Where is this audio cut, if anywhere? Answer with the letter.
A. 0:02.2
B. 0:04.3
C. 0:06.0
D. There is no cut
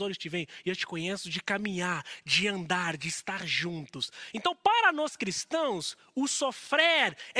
B